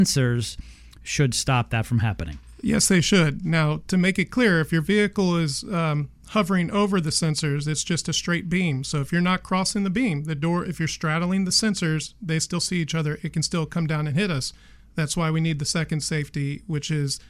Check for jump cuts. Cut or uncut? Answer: uncut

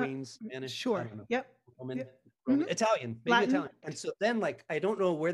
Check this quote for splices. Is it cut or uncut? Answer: cut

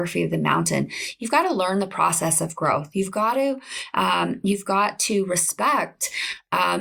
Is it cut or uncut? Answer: uncut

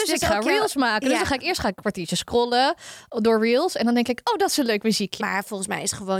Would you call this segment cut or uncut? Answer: cut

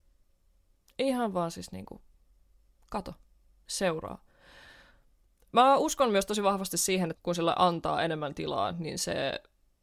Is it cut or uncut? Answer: cut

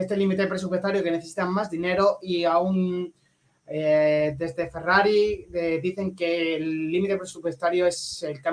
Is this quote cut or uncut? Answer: uncut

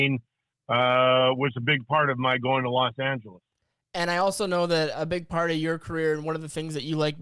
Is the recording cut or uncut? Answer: uncut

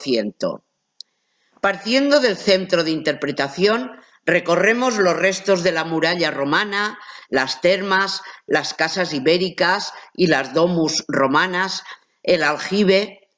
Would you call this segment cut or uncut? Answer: uncut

